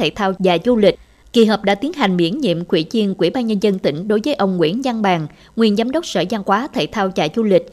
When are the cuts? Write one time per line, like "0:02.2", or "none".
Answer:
0:01.2